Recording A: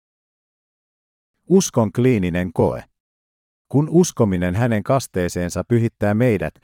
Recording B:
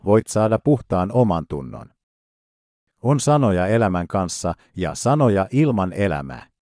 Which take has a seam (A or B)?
A